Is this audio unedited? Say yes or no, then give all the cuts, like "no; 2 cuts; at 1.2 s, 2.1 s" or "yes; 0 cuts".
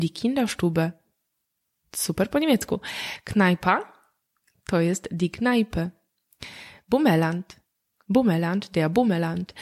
yes; 0 cuts